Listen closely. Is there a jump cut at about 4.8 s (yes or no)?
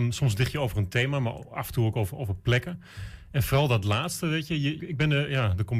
yes